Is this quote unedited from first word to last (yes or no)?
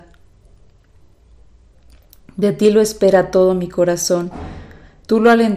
yes